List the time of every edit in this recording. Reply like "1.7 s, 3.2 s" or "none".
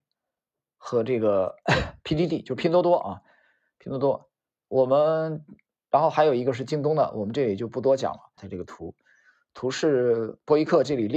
8.4 s